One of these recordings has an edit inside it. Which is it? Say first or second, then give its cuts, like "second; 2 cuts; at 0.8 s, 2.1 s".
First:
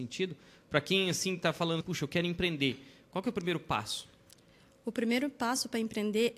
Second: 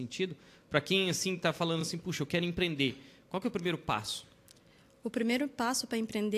first; 1 cut; at 1.8 s